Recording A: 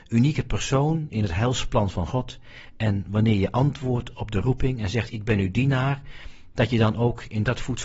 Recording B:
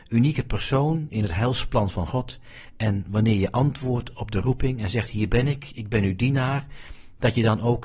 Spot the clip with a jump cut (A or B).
A